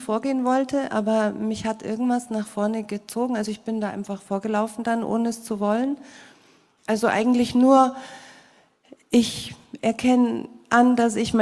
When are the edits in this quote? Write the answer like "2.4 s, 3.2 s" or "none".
6.8 s